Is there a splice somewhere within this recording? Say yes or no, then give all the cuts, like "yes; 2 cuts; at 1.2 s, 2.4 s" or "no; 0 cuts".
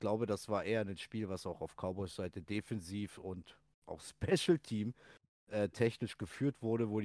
no; 0 cuts